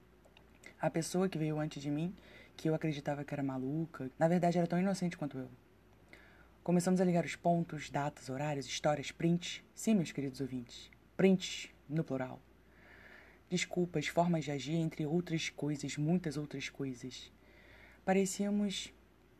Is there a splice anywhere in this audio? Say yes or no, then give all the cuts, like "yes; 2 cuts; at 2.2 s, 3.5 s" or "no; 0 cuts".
yes; 1 cut; at 4.1 s